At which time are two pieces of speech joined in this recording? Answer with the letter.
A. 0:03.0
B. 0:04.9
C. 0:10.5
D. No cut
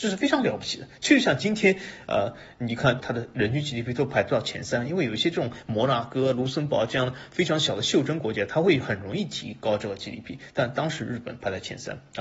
A